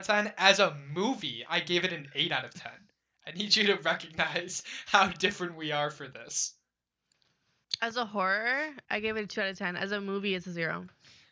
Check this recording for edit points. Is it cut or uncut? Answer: uncut